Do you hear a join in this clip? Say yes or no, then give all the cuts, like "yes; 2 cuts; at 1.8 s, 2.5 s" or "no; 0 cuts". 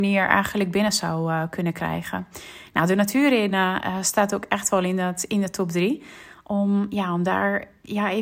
no; 0 cuts